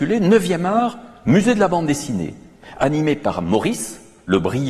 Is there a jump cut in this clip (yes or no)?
no